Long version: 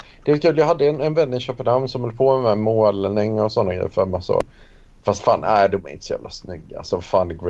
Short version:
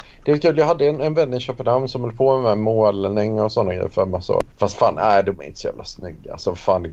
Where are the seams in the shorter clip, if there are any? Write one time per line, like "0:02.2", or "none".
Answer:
0:04.5